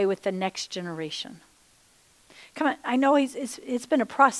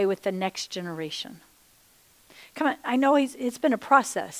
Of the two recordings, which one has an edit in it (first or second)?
second